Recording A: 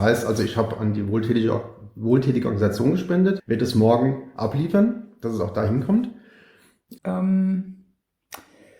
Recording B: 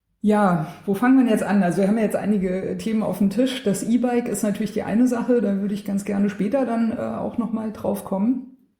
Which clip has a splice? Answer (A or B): A